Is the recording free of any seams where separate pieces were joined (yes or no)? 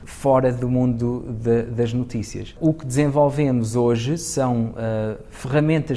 yes